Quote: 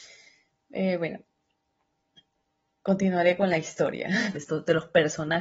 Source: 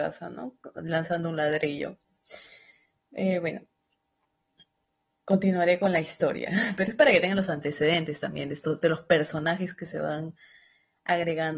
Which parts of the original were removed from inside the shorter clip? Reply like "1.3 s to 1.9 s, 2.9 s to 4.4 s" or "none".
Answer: 6.8 s to 8.5 s